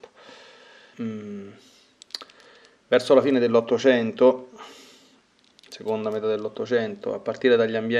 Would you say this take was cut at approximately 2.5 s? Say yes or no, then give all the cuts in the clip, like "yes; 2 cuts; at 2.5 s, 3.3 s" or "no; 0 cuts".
no; 1 cut; at 0.9 s